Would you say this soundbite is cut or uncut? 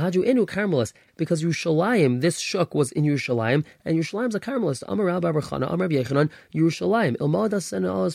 cut